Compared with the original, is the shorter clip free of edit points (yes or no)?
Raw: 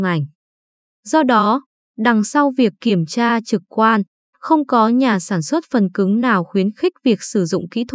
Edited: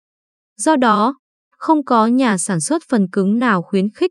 no